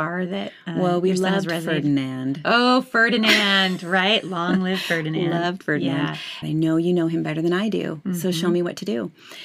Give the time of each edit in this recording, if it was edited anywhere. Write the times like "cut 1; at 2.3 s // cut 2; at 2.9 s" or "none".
cut 1; at 6.4 s

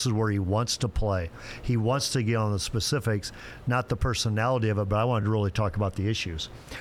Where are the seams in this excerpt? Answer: none

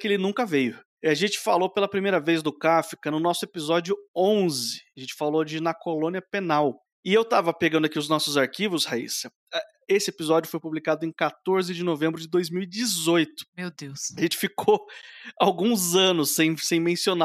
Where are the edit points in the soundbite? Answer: none

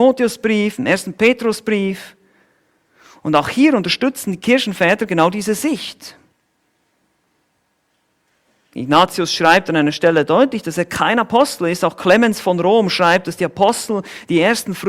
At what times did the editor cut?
none

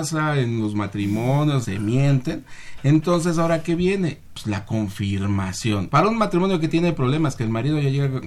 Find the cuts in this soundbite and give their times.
cut 1; at 1.6 s // cut 2; at 5.9 s

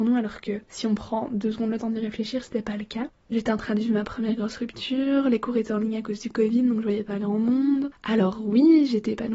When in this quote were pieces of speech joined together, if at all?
cut 1; at 3.3 s

